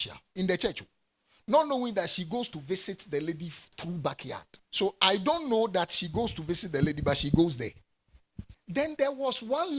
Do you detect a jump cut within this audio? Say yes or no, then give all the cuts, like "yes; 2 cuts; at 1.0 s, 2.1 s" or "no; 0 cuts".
yes; 2 cuts; at 4.6 s, 8.5 s